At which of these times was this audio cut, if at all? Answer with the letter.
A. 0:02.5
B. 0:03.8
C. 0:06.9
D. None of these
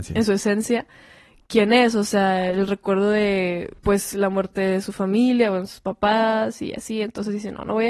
B